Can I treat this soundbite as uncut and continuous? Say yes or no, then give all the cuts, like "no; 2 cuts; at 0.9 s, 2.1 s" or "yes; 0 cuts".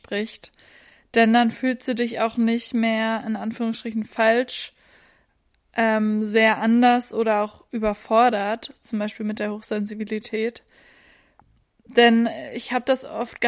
yes; 0 cuts